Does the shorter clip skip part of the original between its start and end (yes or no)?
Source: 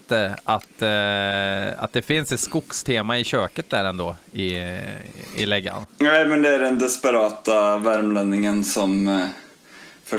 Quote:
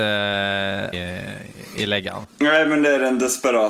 yes